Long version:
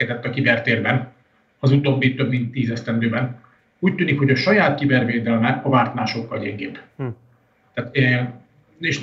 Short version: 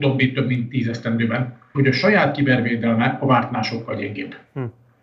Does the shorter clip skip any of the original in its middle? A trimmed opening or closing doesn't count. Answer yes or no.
yes